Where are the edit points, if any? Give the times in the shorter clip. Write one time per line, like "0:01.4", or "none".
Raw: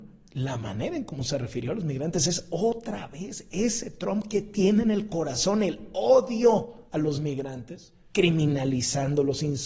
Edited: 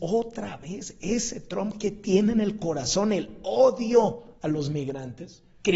none